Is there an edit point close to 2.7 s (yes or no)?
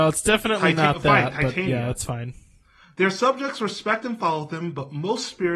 no